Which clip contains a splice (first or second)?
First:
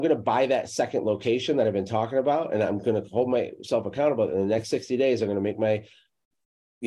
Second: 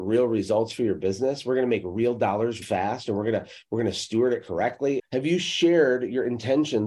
second